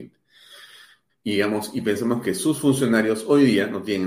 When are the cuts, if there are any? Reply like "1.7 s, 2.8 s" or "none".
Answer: 1.1 s